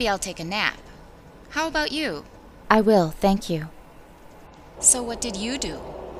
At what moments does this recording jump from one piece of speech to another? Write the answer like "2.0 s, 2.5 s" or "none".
2.6 s, 4.8 s